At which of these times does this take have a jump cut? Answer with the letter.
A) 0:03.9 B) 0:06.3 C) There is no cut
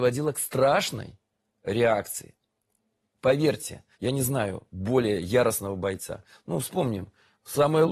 A